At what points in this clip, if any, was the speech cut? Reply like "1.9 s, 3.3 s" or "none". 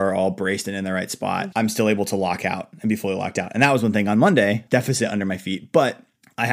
1.5 s, 4.7 s